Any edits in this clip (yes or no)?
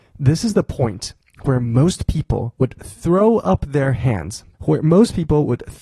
yes